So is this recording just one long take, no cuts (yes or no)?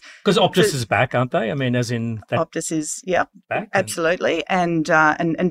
yes